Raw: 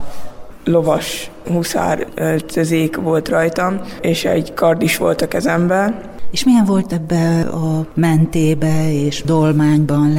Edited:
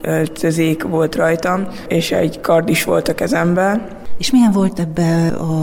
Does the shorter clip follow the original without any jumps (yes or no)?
yes